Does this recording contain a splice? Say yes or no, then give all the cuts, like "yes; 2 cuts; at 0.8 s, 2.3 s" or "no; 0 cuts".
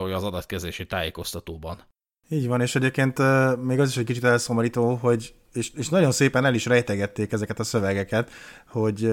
no; 0 cuts